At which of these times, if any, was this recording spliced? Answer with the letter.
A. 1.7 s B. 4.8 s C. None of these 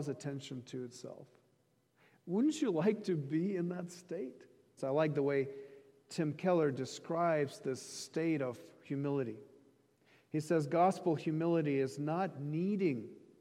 B